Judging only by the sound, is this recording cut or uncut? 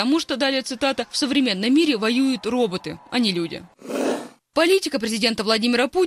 uncut